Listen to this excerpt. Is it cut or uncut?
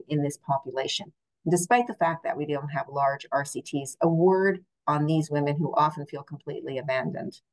uncut